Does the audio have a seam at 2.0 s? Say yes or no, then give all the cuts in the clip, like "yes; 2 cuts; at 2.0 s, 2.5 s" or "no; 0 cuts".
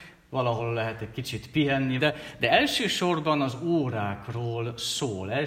yes; 1 cut; at 2.0 s